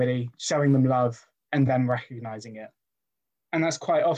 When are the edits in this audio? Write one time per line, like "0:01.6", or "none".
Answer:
none